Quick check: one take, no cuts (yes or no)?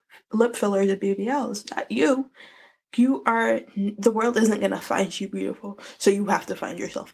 yes